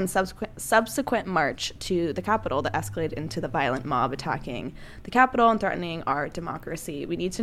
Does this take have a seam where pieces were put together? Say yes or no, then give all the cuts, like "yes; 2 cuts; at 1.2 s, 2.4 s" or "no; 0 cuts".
no; 0 cuts